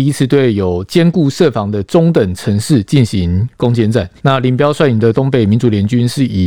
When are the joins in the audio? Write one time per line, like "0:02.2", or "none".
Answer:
0:04.2